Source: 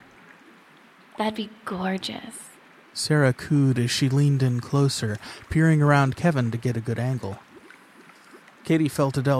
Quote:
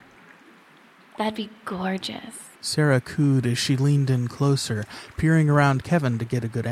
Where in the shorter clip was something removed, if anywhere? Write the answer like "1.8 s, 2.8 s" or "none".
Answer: 2.6 s